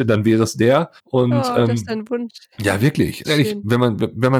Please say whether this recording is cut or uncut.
cut